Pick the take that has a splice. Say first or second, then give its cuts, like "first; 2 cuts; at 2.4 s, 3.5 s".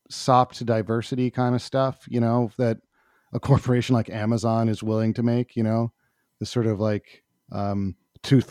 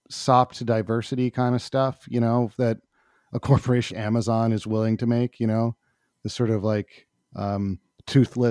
second; 1 cut; at 3.9 s